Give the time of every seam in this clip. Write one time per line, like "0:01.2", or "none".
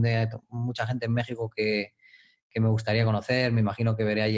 none